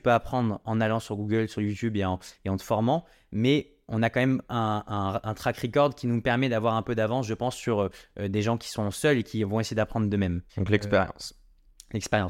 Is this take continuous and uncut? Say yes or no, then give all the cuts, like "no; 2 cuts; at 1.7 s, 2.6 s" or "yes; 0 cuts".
no; 2 cuts; at 4.8 s, 10.5 s